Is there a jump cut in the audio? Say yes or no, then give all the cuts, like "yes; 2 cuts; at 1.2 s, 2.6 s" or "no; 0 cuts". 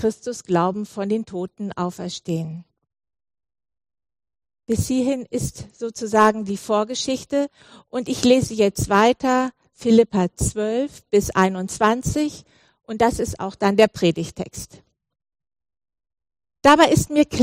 no; 0 cuts